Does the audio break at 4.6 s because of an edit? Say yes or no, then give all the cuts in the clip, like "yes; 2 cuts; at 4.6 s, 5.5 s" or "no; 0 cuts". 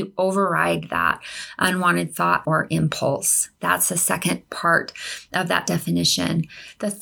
no; 1 cut; at 2.4 s